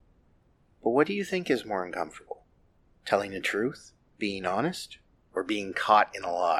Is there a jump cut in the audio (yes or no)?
no